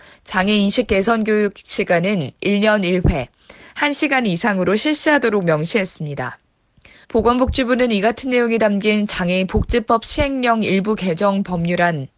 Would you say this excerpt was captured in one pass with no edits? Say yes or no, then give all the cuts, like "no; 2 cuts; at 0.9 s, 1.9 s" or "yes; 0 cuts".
no; 1 cut; at 7.0 s